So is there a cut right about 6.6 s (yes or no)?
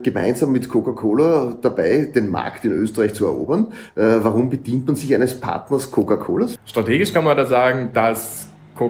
yes